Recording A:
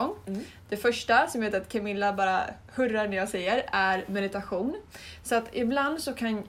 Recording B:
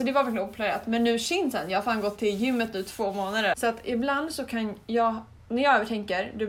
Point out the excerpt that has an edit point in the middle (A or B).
B